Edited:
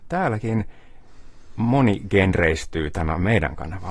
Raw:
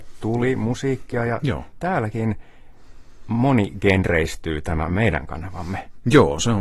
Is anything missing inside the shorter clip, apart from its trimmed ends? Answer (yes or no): no